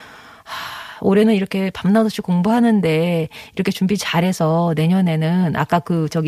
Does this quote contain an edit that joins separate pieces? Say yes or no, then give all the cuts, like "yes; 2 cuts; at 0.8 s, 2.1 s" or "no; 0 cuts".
no; 0 cuts